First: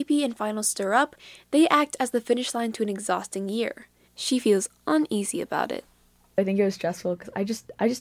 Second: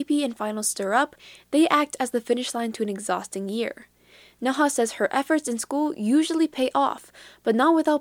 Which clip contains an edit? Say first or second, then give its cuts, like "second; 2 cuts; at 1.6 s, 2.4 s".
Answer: first; 1 cut; at 4.0 s